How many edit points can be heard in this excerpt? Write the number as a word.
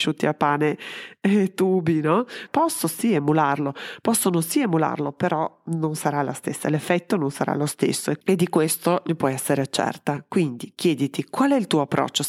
one